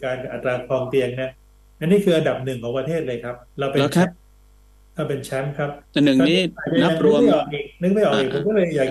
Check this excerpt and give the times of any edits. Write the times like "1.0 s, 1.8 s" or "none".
3.5 s, 5.8 s